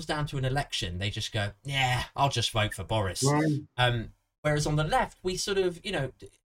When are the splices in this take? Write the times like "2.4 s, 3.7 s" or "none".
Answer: none